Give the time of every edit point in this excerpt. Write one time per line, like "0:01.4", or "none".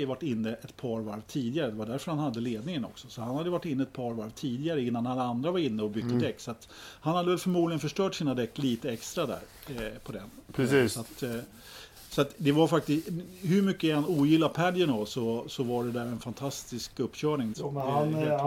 0:17.5